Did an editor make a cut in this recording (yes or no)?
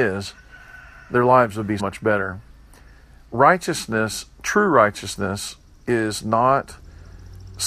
yes